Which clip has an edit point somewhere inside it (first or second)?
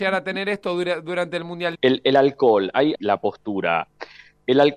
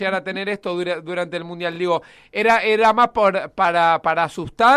first